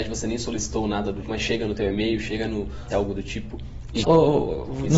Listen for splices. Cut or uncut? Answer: cut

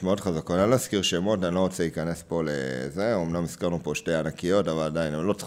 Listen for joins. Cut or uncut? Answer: uncut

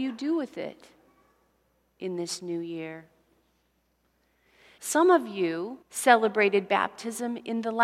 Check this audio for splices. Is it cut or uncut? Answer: cut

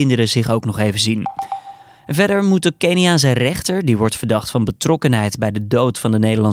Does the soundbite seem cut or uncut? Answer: uncut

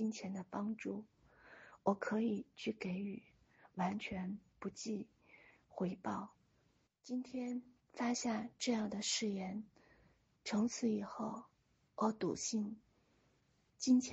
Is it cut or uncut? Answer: cut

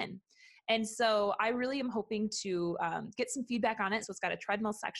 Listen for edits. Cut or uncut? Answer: cut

